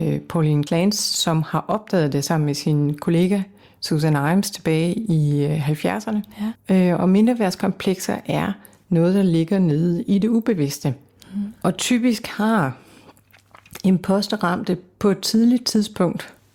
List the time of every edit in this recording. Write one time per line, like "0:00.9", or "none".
0:06.6